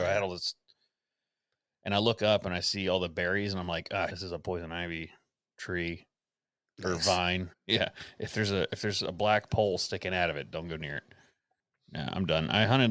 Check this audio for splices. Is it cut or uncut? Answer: cut